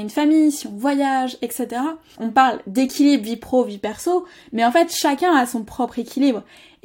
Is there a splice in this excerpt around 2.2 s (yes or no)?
yes